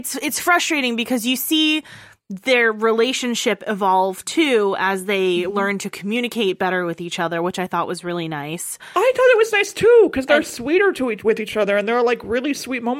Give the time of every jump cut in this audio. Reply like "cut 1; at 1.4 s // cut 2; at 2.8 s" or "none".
none